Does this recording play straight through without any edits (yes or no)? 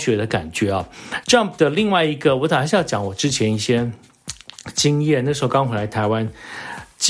yes